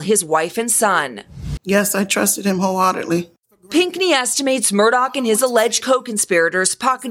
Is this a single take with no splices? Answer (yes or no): no